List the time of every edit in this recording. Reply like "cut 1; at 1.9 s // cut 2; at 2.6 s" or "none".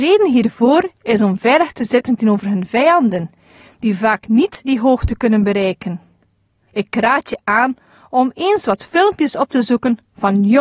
cut 1; at 6.7 s